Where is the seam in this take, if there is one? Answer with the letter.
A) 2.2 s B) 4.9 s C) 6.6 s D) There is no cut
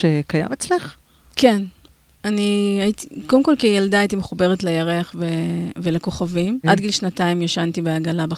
C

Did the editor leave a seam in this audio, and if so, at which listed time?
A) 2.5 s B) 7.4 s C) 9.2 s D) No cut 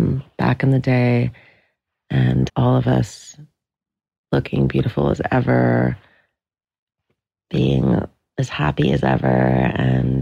A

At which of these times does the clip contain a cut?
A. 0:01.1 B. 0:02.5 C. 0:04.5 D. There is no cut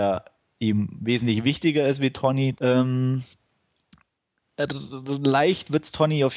B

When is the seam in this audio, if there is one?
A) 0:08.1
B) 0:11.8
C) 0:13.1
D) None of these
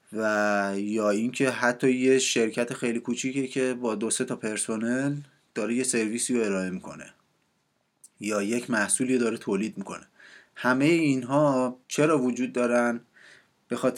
B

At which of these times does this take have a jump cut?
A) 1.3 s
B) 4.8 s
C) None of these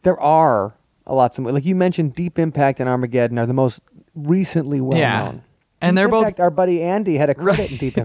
C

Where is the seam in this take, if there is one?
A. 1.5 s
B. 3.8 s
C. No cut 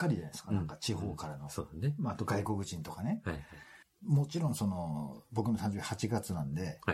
B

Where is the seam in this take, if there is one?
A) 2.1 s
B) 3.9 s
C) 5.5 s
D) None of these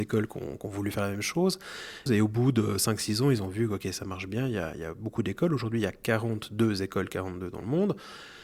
A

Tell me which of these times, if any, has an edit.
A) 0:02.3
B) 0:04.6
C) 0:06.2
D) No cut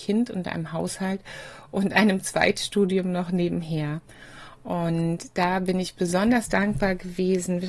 D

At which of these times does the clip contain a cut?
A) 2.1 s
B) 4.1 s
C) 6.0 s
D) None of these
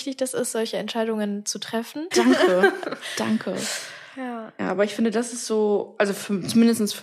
A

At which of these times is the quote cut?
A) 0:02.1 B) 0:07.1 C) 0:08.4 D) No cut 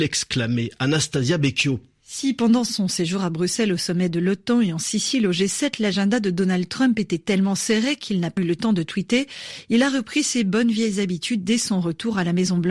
C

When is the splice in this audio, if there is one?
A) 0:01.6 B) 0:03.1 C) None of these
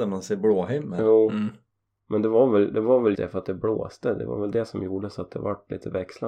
B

